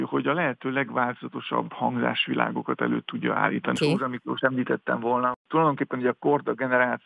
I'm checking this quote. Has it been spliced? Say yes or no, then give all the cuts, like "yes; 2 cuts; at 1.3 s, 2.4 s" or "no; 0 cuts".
yes; 1 cut; at 3.8 s